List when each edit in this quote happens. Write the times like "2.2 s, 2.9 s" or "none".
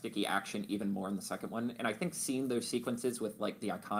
none